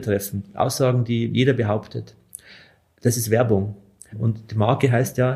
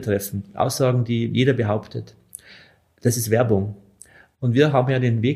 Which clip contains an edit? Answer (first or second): first